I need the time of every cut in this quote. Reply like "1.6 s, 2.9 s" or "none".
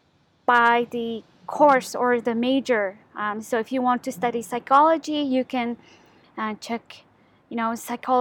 none